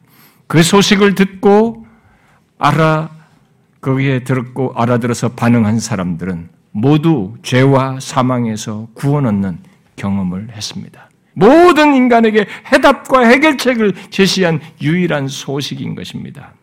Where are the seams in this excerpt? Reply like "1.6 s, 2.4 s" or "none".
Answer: 11.3 s